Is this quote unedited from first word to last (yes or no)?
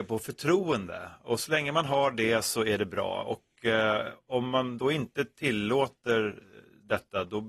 yes